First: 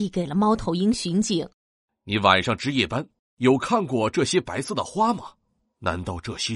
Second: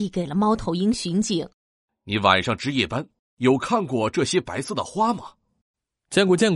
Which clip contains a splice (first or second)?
first